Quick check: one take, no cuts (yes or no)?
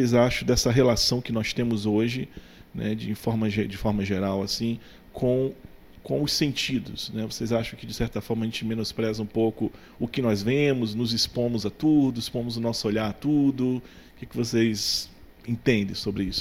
yes